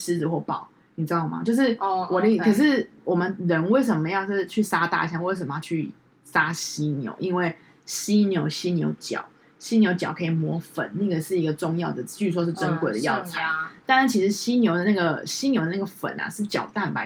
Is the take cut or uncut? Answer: uncut